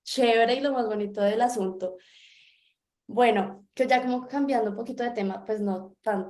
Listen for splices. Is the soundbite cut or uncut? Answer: uncut